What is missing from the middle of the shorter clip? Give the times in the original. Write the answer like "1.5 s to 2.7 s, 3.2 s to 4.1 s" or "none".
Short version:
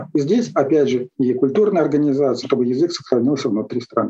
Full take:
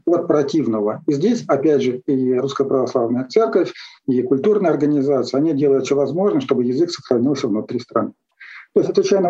2.0 s to 4.0 s, 5.3 s to 6.4 s